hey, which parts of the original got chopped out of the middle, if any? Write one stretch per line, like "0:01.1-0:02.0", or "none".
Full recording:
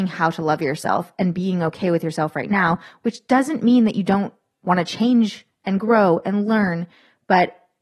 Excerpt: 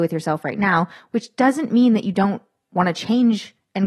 none